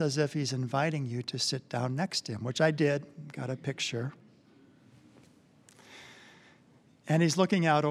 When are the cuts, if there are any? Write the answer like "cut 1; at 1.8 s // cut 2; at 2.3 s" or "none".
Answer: none